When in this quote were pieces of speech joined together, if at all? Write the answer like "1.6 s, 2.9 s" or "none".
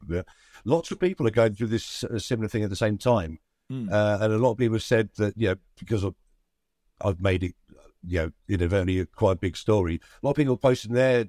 none